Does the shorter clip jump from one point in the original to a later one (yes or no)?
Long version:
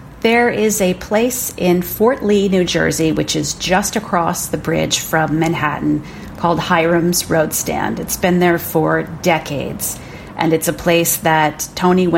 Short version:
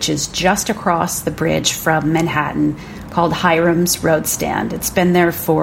no